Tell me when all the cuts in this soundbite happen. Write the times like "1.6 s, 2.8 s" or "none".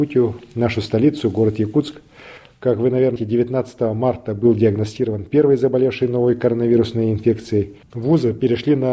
3.2 s, 7.8 s